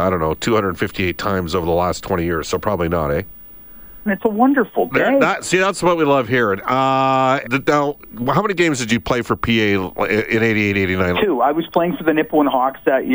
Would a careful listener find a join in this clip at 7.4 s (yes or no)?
yes